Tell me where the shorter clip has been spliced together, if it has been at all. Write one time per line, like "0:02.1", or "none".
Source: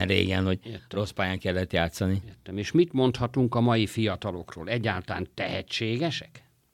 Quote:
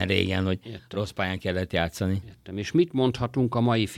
none